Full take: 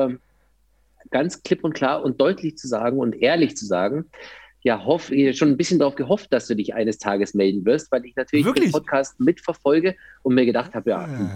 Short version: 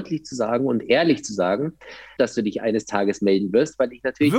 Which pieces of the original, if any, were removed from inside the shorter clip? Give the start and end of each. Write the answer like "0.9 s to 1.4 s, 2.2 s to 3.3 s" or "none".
4.5 s to 6.3 s